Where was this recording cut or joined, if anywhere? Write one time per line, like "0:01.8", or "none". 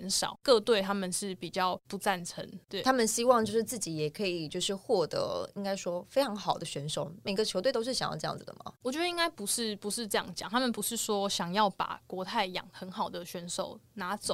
none